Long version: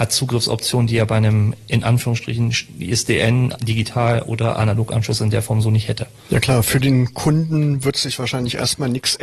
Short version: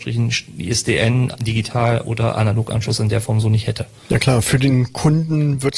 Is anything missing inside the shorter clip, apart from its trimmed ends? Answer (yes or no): no